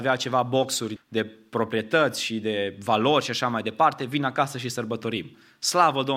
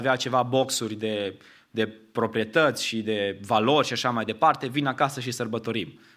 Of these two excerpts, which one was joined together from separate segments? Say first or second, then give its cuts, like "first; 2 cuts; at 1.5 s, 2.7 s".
first; 1 cut; at 1.0 s